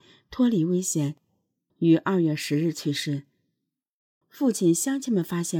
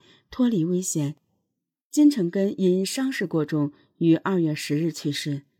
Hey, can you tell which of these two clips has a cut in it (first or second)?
first